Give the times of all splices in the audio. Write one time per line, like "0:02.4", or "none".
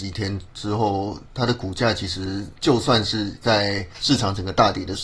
none